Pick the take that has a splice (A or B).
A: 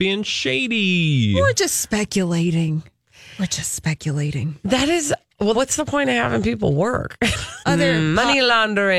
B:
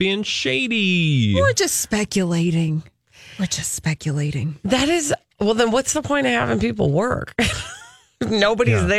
A